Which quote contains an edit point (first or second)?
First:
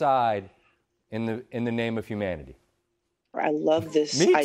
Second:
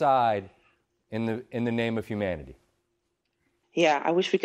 first